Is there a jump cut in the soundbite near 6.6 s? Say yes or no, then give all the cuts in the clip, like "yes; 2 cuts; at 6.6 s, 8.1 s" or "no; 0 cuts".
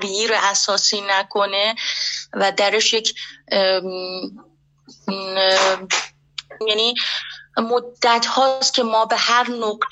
yes; 1 cut; at 6.6 s